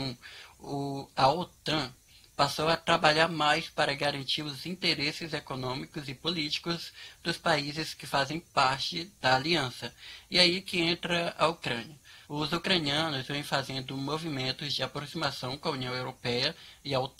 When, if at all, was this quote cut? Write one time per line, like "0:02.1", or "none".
0:12.2